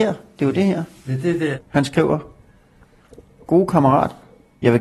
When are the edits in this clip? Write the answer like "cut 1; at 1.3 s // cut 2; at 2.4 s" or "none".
none